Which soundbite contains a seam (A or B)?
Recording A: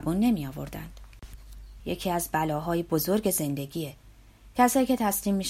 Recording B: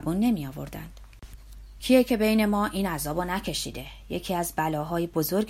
A